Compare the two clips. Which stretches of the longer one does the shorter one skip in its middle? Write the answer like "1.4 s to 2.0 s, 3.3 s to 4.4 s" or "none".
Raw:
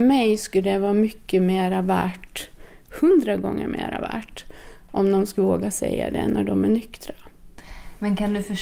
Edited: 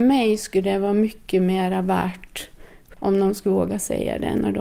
2.9 s to 4.8 s